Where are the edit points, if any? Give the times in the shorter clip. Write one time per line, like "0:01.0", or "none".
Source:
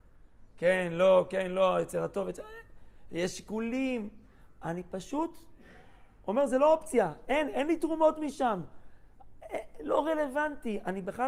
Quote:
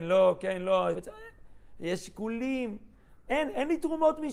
0:00.9
0:03.3